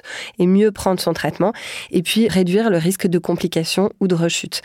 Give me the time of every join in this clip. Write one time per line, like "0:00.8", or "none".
0:02.3